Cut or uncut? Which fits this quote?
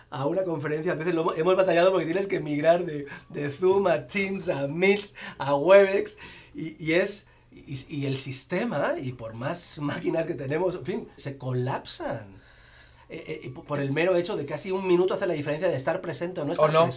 cut